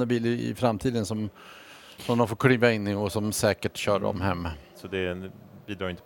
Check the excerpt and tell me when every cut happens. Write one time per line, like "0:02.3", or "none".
0:04.7